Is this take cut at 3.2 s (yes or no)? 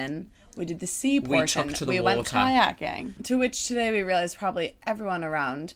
yes